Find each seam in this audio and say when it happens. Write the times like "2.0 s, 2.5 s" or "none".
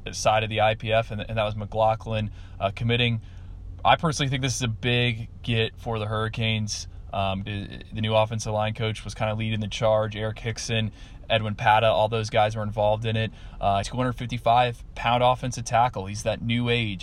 7.4 s, 13.8 s